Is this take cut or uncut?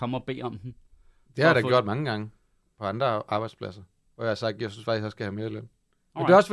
uncut